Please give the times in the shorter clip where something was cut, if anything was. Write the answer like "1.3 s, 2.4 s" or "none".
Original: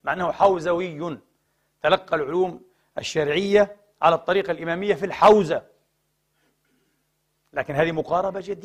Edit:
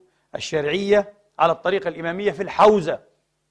none